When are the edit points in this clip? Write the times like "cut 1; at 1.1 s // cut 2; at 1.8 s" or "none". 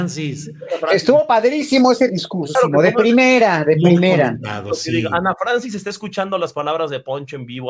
cut 1; at 2.5 s